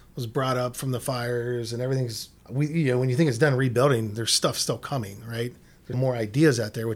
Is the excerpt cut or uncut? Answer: cut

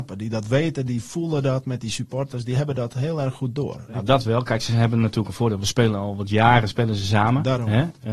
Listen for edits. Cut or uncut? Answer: uncut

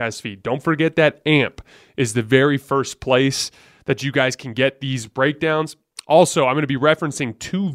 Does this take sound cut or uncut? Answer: uncut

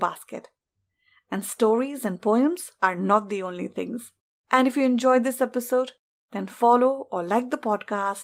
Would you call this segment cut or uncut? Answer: cut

